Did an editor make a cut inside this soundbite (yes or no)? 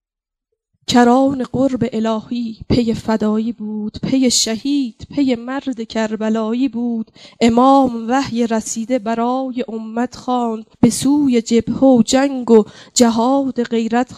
yes